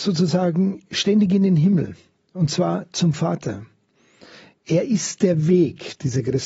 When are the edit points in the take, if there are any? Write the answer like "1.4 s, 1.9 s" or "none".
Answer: none